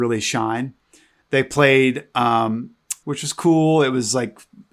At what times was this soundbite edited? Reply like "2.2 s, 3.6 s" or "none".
3.0 s

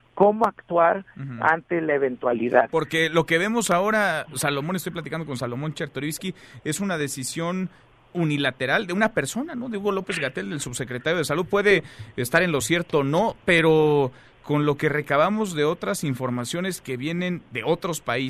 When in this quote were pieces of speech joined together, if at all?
none

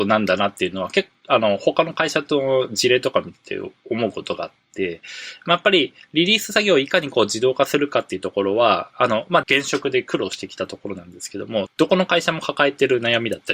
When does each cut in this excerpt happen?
9.4 s, 11.7 s

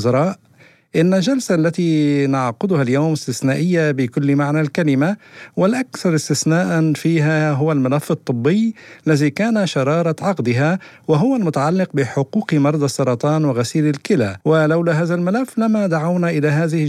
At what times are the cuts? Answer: 14.4 s

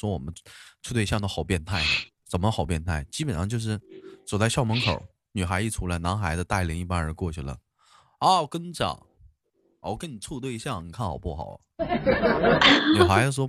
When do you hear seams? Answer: none

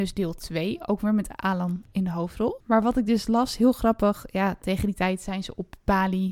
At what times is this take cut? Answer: 2.6 s

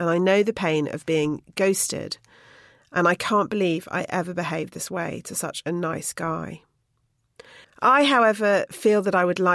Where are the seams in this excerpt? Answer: 7.6 s

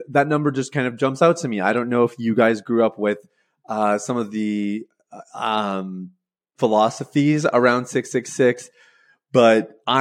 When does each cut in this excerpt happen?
none

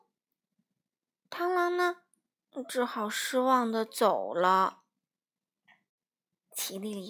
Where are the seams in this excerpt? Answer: none

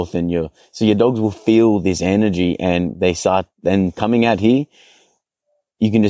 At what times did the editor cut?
none

